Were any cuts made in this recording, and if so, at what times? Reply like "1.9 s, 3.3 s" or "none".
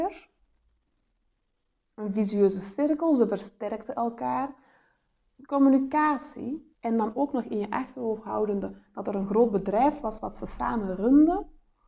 5.4 s, 6.7 s